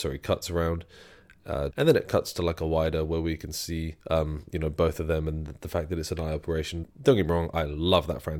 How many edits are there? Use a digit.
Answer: 3